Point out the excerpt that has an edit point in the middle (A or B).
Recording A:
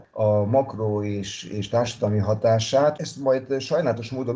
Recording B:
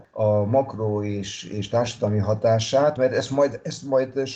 A